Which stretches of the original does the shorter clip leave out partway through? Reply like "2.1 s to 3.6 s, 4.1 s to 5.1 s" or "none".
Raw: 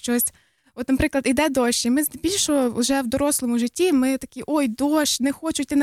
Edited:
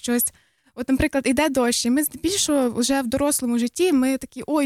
none

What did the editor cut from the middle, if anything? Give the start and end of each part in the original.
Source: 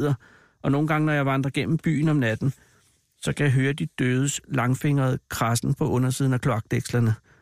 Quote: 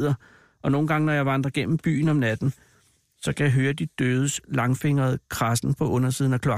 none

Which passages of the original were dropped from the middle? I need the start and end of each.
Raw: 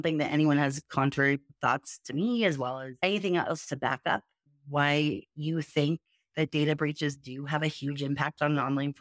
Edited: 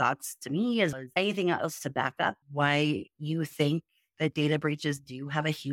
2.6 s to 2.8 s, 4.3 s to 4.6 s

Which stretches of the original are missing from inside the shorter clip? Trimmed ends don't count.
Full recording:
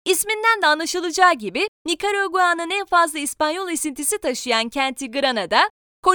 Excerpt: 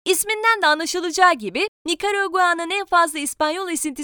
none

